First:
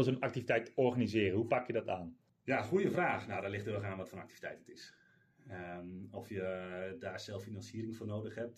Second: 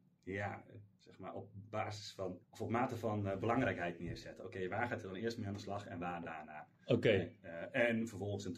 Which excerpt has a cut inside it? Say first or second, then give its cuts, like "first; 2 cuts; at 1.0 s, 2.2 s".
second; 1 cut; at 2.4 s